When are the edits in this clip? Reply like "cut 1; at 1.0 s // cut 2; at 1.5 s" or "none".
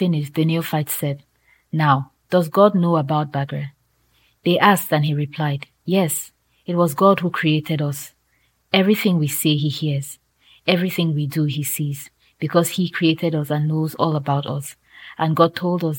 none